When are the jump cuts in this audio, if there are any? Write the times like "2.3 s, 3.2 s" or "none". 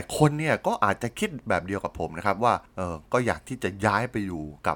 none